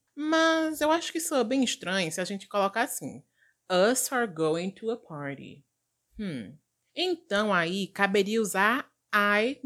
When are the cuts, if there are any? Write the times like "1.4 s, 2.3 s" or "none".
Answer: none